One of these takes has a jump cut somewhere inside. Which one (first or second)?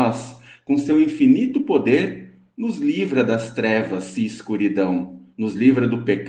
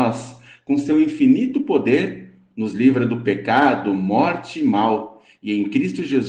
second